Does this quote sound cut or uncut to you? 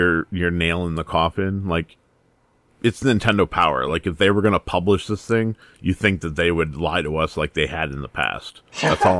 uncut